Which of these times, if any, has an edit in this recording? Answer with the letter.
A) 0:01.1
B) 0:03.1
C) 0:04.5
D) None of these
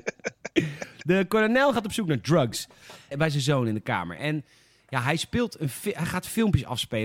B